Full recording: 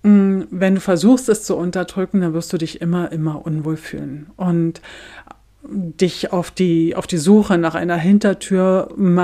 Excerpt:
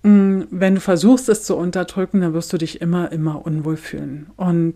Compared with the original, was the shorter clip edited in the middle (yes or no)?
no